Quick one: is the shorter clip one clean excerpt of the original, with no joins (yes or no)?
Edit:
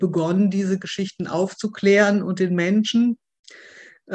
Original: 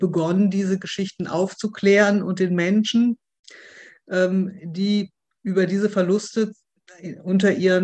yes